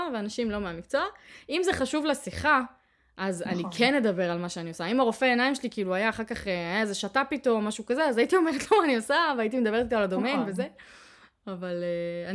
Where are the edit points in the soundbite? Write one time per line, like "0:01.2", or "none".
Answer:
none